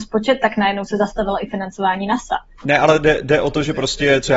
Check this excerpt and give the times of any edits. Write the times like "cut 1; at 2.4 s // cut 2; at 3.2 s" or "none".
cut 1; at 2.6 s